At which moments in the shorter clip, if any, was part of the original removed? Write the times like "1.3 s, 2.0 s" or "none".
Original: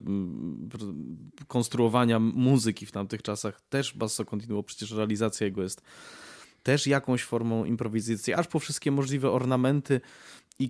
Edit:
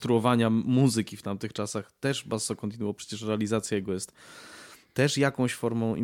none